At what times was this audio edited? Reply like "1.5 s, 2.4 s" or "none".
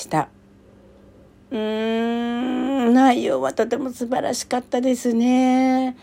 none